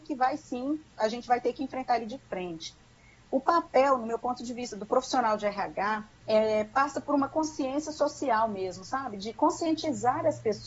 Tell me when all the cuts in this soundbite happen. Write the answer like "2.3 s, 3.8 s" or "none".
none